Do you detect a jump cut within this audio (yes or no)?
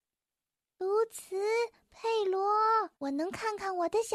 yes